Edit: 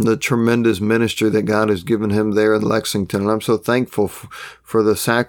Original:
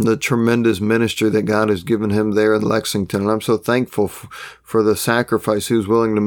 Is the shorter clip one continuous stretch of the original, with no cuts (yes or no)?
yes